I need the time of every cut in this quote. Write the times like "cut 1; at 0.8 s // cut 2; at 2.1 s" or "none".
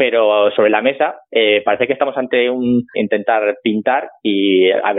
cut 1; at 2.9 s